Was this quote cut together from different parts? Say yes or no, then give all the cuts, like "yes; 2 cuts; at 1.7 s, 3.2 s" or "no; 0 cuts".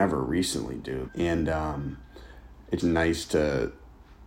yes; 2 cuts; at 1.1 s, 2.8 s